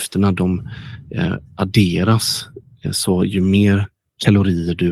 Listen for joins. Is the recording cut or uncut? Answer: uncut